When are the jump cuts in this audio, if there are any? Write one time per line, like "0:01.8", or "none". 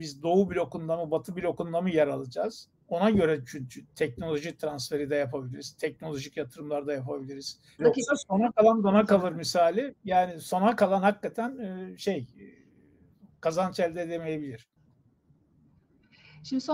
0:07.8

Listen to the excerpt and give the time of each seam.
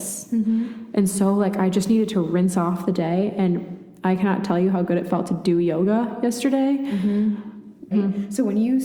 0:07.9

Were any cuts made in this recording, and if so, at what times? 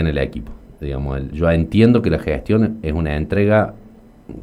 0:01.3

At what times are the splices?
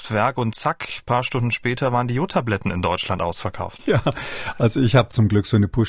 0:03.8

